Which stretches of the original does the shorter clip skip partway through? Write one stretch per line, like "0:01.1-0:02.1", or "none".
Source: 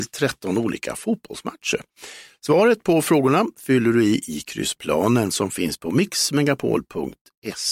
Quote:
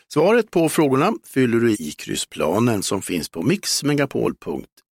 0:04.1-0:04.2

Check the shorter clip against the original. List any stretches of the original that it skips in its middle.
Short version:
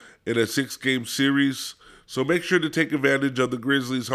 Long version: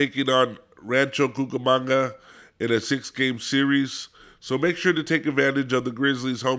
none

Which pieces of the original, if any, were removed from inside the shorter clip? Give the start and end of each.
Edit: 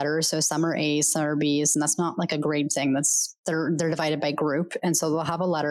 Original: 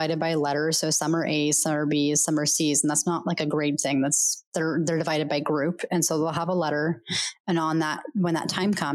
0:02.2-0:02.8

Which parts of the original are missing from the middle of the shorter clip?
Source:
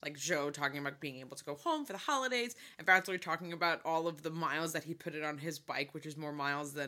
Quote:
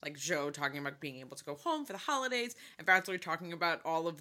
none

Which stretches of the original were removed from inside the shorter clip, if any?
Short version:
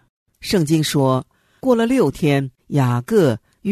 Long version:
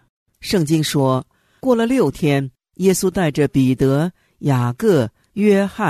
0:02.6-0:04.3

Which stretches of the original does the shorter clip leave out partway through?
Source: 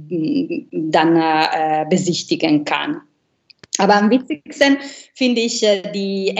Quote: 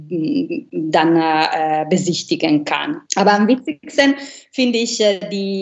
0:03.1-0:03.7

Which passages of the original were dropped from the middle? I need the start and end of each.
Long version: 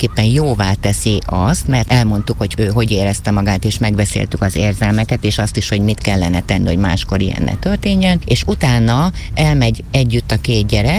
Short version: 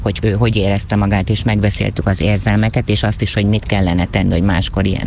none

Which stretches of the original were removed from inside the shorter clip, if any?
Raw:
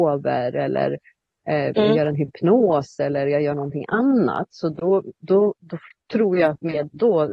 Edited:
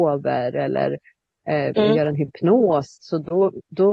0:03.0-0:04.5

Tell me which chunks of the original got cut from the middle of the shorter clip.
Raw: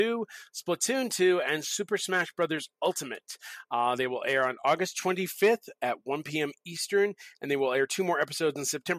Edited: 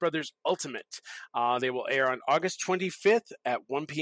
none

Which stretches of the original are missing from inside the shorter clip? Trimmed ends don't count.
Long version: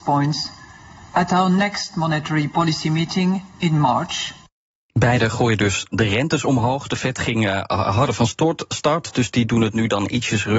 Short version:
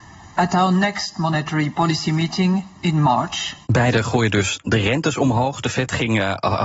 0:04.4-0:04.9

